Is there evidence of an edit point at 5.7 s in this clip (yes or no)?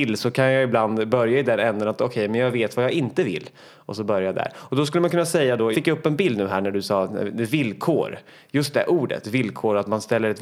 yes